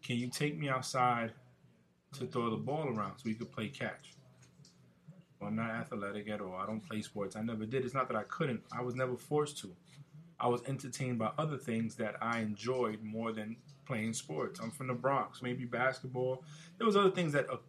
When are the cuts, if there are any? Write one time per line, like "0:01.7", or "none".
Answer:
0:05.4
0:10.3
0:15.4